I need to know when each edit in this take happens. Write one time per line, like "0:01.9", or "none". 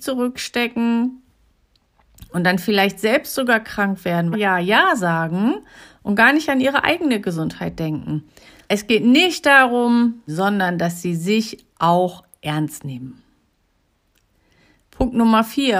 0:04.3
0:08.7
0:10.3